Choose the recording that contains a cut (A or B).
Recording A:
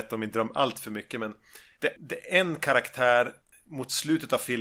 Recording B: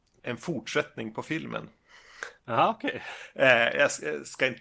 A